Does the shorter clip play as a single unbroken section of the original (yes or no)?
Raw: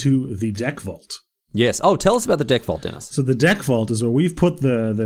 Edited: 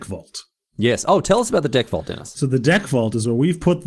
yes